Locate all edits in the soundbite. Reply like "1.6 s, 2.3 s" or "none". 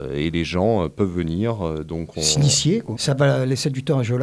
2.9 s

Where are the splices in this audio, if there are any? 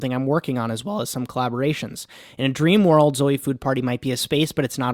none

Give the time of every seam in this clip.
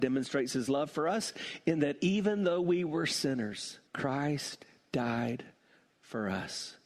3.9 s

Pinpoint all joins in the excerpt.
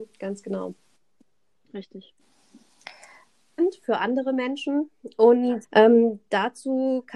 3.6 s, 5.6 s

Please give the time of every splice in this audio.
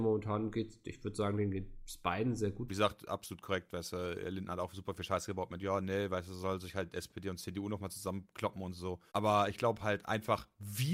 2.7 s, 9.1 s

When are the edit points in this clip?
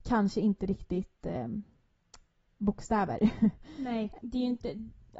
4.2 s

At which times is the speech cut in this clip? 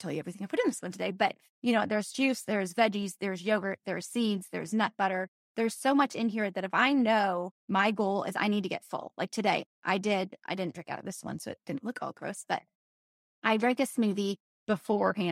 2.4 s, 7.6 s

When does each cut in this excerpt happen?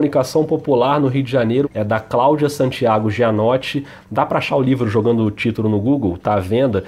1.6 s

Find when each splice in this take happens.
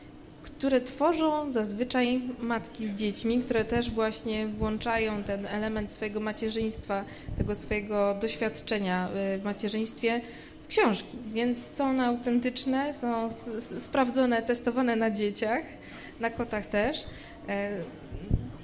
none

